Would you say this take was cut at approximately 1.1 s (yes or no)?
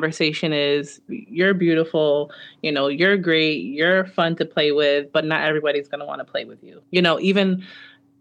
yes